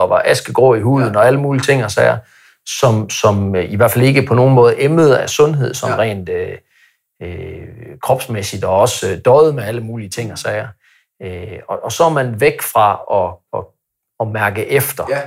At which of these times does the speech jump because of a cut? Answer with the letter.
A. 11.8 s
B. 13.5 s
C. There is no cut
B